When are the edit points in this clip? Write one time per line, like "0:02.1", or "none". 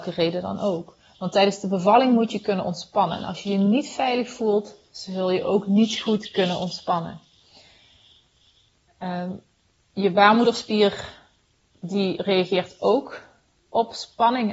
0:01.1